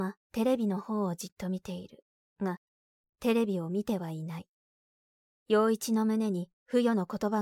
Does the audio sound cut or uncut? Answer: uncut